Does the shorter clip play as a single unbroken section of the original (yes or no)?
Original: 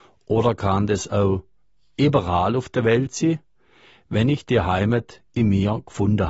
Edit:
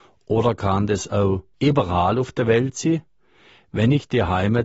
no